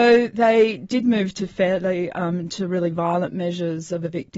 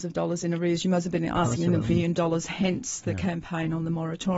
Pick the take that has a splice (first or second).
second